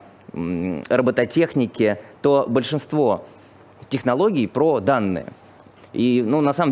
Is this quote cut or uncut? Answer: cut